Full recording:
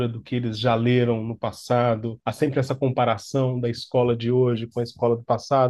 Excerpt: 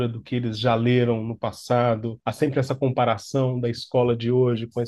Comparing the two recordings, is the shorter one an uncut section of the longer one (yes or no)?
yes